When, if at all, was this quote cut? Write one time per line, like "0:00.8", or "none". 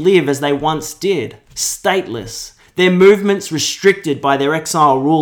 0:01.4